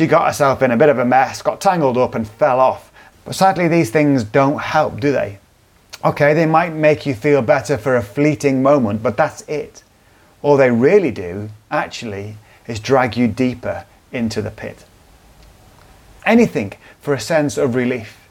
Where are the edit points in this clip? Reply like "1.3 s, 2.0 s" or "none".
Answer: 3.1 s, 16.2 s